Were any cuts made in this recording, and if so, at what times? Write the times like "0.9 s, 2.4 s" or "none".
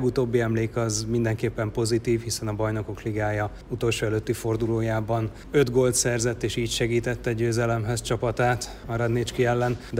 none